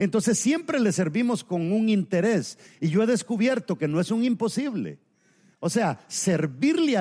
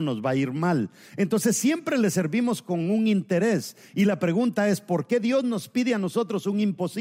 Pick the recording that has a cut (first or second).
first